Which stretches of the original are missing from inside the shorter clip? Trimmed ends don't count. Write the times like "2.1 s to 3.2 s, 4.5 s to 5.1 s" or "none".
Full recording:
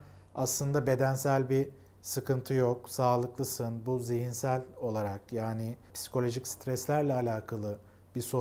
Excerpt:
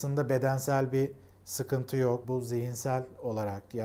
2.8 s to 3.8 s